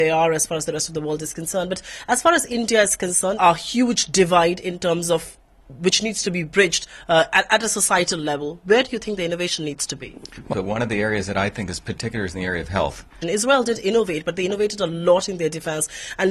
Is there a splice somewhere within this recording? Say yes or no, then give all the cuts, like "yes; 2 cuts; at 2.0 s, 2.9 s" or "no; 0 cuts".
yes; 3 cuts; at 3.4 s, 10.5 s, 13.2 s